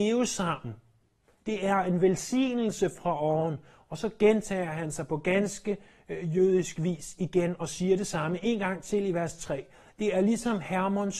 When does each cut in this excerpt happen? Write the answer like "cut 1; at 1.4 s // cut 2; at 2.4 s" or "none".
none